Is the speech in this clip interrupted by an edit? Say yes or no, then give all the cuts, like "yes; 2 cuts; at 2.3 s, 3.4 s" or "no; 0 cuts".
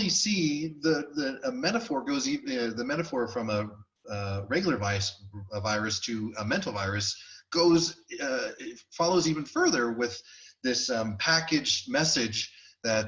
no; 0 cuts